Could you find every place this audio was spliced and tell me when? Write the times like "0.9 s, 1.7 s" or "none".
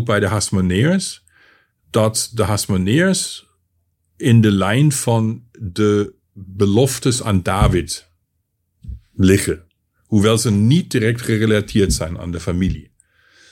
none